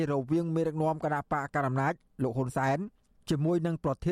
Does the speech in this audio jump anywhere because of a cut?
no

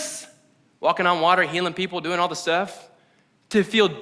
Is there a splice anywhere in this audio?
no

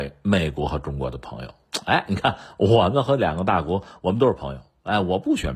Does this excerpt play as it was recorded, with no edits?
yes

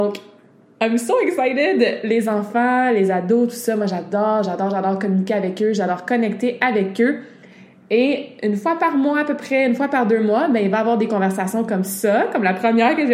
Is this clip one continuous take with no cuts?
yes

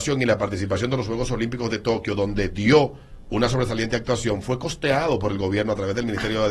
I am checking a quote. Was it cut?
no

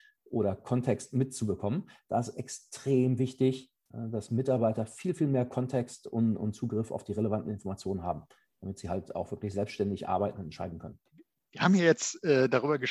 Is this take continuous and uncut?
yes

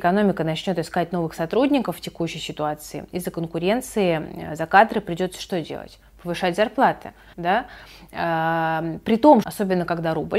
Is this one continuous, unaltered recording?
no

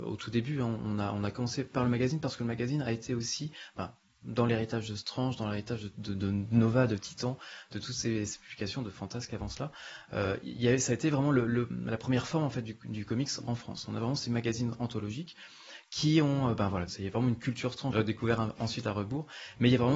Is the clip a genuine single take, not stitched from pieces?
no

